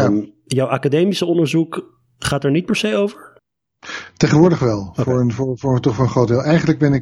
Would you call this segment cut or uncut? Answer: uncut